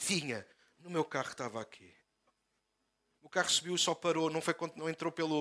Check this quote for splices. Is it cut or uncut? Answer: uncut